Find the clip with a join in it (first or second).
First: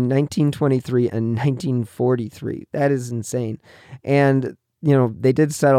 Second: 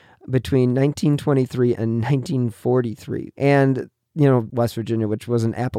second